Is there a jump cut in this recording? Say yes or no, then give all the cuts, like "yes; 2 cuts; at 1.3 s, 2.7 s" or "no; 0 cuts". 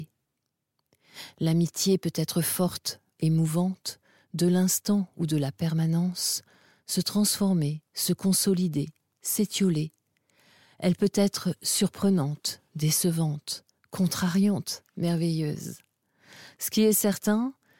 no; 0 cuts